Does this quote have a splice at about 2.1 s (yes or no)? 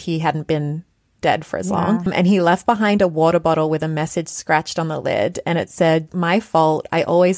yes